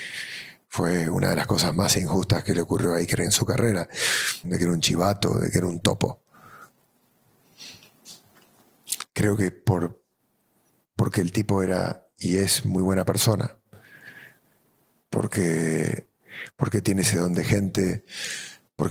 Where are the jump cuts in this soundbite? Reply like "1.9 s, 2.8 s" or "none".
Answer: 4.4 s, 9.1 s